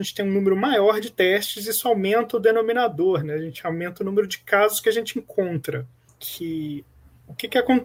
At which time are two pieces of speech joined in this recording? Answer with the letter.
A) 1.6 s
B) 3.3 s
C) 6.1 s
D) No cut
C